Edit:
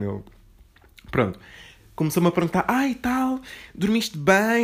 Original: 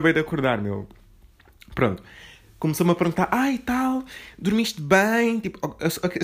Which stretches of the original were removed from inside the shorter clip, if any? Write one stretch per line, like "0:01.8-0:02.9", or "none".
none